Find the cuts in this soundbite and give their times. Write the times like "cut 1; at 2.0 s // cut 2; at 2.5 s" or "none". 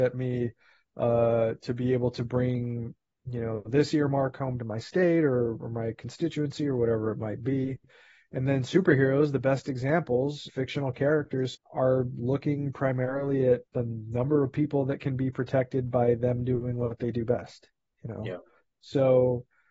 cut 1; at 10.5 s // cut 2; at 11.5 s // cut 3; at 13.7 s

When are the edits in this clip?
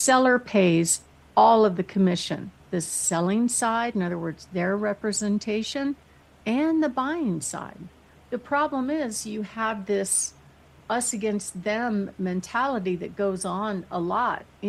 cut 1; at 2.6 s // cut 2; at 10.8 s

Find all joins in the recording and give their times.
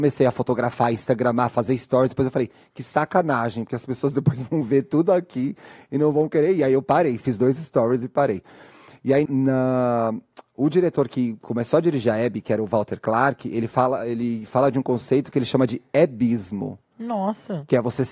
cut 1; at 9.3 s

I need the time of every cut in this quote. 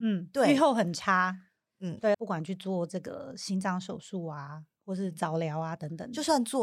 cut 1; at 2.1 s

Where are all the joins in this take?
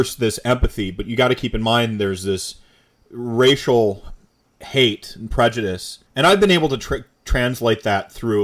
cut 1; at 6.1 s

